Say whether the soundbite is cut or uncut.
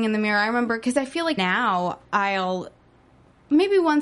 cut